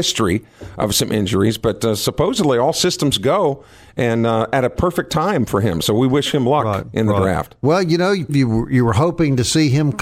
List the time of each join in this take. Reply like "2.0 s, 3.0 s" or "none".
8.3 s